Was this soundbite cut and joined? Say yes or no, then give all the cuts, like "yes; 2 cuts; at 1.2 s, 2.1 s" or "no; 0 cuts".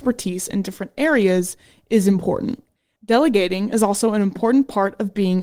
no; 0 cuts